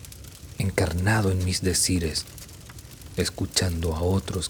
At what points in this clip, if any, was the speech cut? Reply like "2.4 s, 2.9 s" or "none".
3.1 s

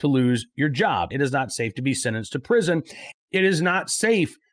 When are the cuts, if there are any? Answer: 1.1 s, 3.1 s

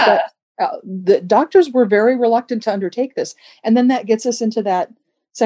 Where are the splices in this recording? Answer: none

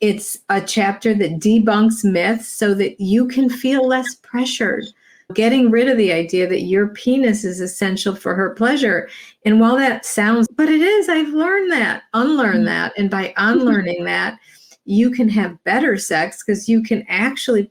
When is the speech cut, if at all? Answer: 5.3 s, 10.5 s

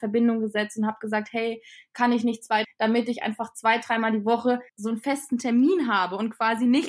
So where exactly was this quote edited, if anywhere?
2.6 s, 4.7 s

